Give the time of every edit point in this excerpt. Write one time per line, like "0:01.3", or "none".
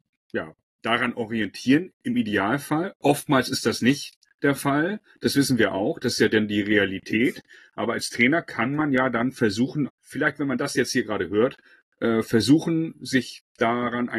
0:09.9